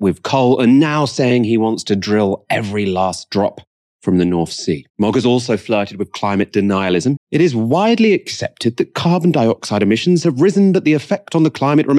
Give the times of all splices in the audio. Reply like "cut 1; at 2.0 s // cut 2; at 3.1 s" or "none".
cut 1; at 4.9 s // cut 2; at 7.2 s